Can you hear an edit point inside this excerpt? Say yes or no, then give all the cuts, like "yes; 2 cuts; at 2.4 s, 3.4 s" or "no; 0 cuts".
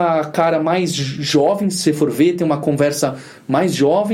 no; 0 cuts